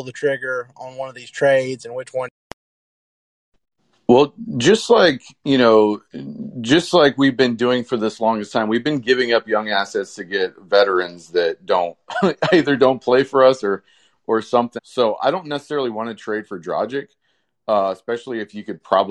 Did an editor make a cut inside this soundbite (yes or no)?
yes